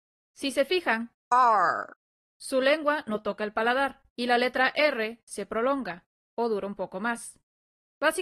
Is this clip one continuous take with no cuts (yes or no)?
no